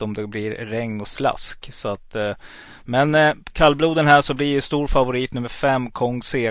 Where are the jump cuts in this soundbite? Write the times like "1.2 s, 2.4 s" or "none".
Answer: none